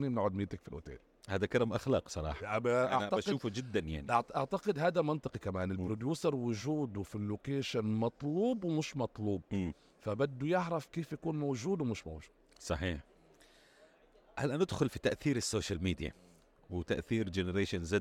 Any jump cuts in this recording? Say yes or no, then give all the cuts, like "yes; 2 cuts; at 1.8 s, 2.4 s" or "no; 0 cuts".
no; 0 cuts